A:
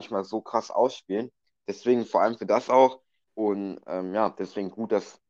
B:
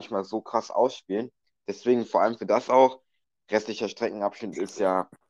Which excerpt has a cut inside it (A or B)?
A